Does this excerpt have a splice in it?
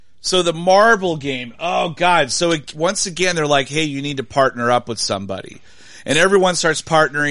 no; 0 cuts

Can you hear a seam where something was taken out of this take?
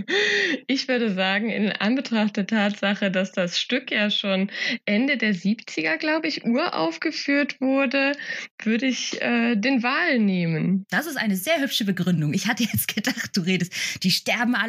no; 0 cuts

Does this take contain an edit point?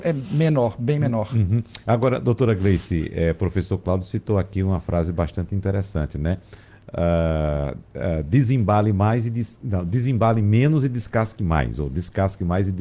no; 0 cuts

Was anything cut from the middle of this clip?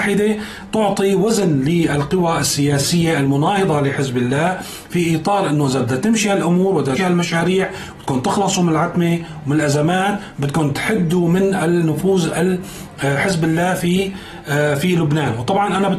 yes; 1 cut; at 7.0 s

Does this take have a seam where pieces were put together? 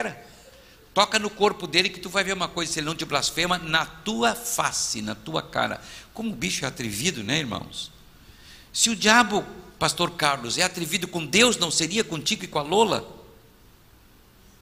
no; 0 cuts

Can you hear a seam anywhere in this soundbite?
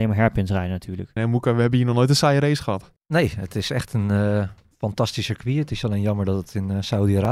yes; 2 cuts; at 1.2 s, 3.0 s

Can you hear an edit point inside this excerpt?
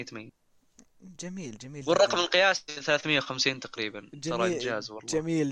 no; 0 cuts

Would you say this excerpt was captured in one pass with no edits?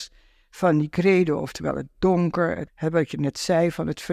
yes; 0 cuts

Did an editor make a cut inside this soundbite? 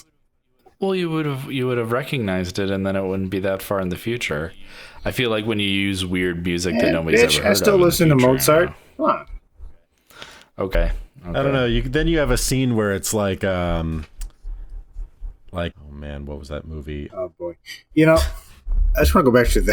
yes; 2 cuts; at 15.7 s, 17.1 s

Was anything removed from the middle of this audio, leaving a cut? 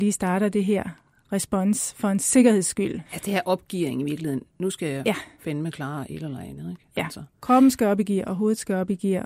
yes; 1 cut; at 3.1 s

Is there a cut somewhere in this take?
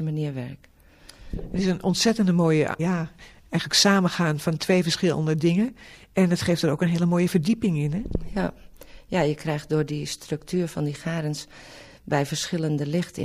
yes; 1 cut; at 2.8 s

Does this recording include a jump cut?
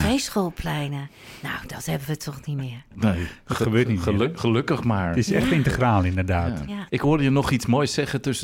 yes; 1 cut; at 6.9 s

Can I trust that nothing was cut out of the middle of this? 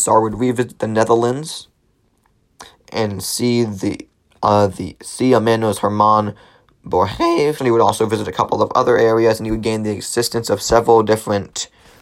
no; 1 cut; at 7.6 s

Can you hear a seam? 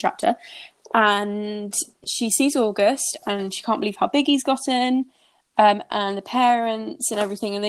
no; 0 cuts

